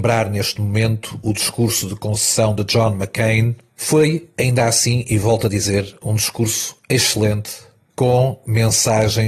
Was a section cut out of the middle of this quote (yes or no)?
no